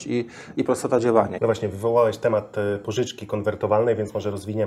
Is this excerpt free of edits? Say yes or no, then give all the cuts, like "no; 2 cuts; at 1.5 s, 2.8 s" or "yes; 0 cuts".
no; 1 cut; at 1.4 s